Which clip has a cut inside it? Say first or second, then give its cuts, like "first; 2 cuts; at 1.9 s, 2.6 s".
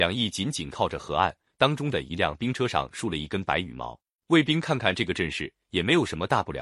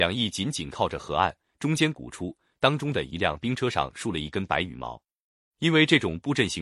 first; 2 cuts; at 1.5 s, 4.2 s